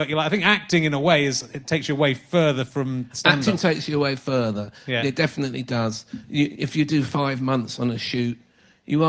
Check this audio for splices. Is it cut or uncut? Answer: uncut